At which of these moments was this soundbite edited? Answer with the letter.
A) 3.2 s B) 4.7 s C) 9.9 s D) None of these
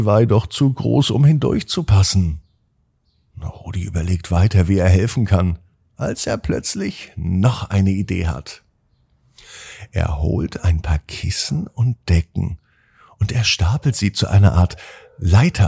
D